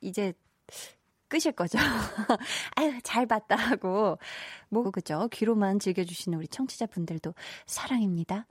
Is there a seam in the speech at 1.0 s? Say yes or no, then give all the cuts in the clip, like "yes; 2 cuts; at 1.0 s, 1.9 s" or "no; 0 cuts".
no; 1 cut; at 4.8 s